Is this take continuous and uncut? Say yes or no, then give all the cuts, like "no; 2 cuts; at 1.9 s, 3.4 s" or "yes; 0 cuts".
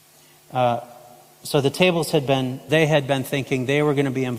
no; 1 cut; at 2.7 s